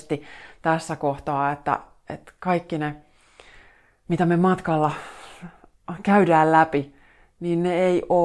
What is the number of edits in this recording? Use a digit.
0